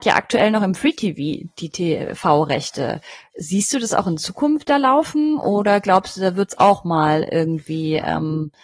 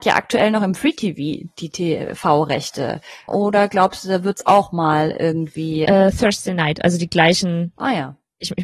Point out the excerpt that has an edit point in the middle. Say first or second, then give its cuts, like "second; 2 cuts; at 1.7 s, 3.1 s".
second; 2 cuts; at 3.3 s, 5.9 s